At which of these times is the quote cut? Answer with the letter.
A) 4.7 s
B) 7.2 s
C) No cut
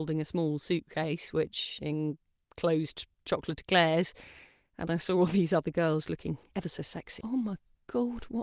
B